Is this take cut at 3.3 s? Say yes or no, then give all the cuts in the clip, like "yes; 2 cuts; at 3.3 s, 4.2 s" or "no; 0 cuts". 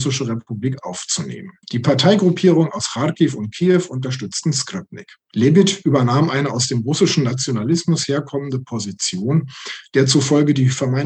no; 2 cuts; at 1.6 s, 5.3 s